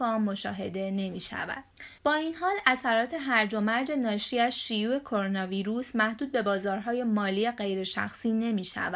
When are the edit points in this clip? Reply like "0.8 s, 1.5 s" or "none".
2.0 s